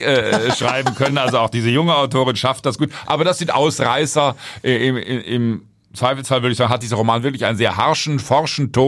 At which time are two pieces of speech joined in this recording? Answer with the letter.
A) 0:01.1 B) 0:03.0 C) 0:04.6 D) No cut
D